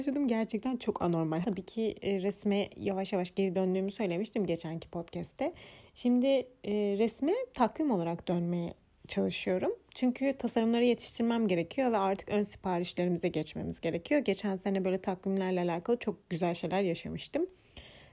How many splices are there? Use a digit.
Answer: 1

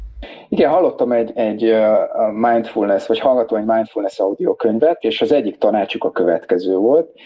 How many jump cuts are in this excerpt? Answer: 1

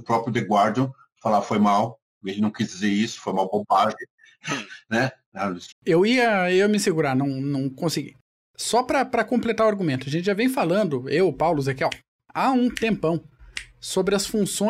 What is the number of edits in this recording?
1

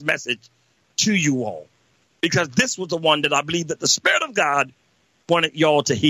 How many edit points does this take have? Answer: 0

